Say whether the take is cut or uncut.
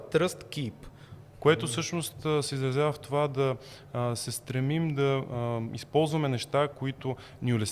cut